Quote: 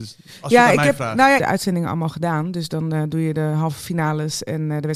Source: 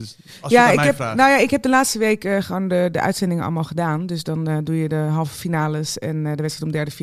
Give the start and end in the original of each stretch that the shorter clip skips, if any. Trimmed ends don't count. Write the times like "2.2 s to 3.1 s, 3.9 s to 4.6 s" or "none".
1.4 s to 2.9 s